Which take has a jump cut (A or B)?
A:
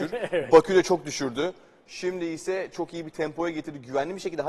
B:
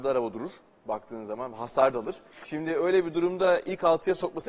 B